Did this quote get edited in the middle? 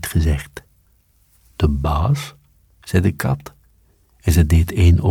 no; 0 cuts

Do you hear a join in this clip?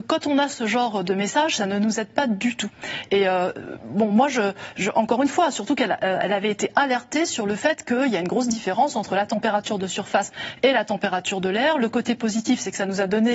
no; 0 cuts

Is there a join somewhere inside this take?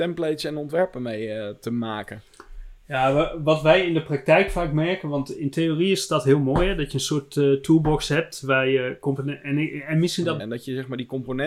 yes; 1 cut; at 10.4 s

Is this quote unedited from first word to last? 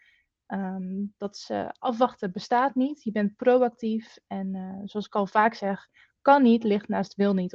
yes; 0 cuts

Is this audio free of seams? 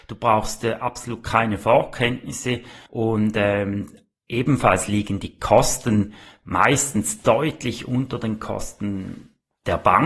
no; 1 cut; at 2.9 s

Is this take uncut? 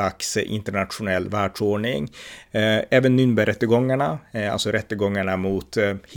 no; 1 cut; at 2.5 s

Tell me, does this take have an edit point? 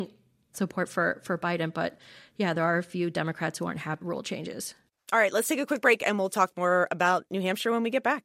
yes; 1 cut; at 4.0 s

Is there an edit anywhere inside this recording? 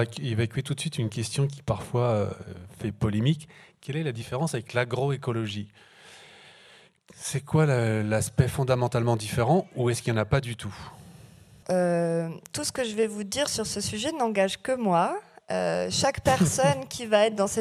yes; 1 cut; at 11.6 s

